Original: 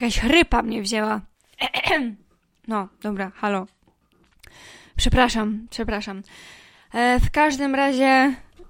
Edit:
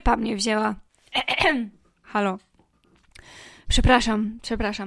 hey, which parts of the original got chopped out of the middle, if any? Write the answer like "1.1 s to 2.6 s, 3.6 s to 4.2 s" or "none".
2.5 s to 3.3 s